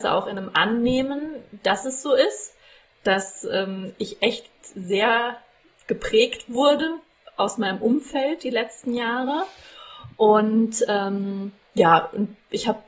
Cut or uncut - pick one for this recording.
uncut